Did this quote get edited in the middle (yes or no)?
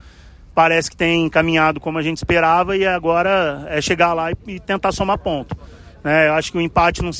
no